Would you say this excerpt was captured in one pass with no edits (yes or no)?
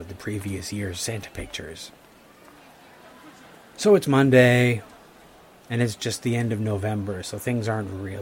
yes